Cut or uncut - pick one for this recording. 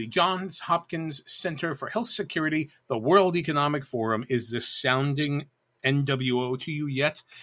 uncut